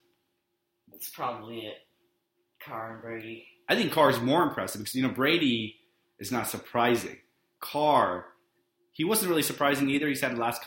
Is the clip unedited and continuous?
yes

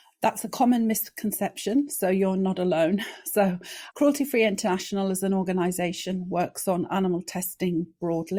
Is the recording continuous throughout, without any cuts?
yes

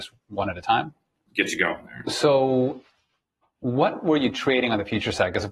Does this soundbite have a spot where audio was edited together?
yes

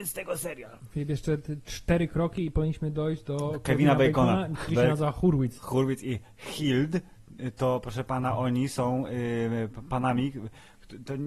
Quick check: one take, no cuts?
no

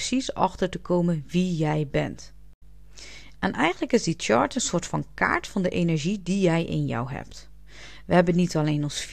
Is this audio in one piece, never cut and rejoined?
no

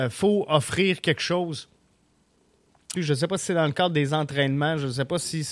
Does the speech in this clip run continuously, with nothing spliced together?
no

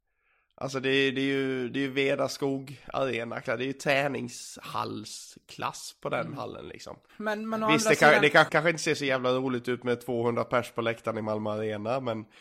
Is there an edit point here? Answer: yes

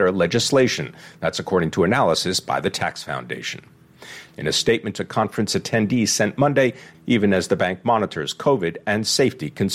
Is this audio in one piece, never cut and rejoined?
no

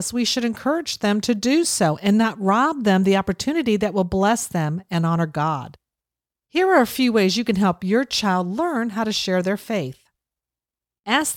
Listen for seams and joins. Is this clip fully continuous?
yes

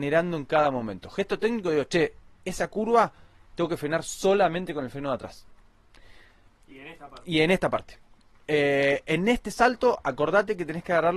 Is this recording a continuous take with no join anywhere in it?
no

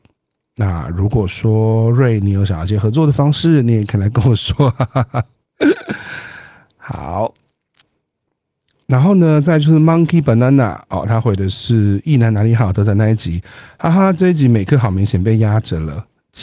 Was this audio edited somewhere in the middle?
no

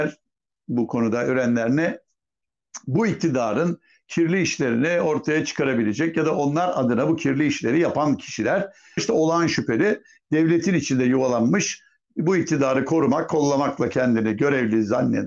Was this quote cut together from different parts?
yes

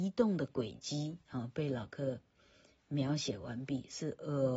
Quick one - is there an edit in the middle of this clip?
no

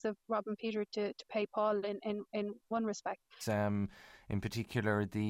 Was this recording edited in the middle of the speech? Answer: yes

